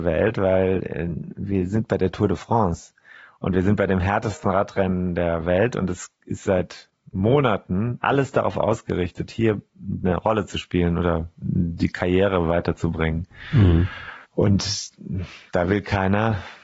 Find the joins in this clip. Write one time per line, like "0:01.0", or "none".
0:14.2